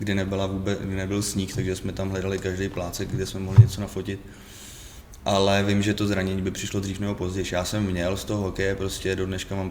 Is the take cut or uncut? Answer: uncut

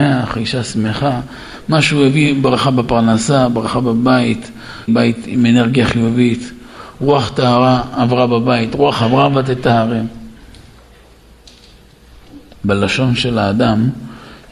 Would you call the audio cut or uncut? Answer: cut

